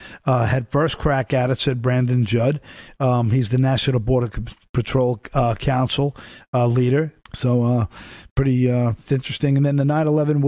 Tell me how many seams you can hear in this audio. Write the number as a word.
two